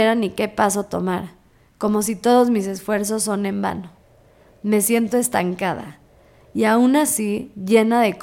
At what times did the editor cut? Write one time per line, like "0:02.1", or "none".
none